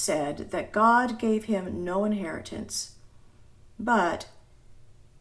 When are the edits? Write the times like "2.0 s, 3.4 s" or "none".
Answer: none